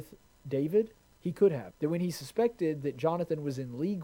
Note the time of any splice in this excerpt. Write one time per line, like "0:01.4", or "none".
0:01.7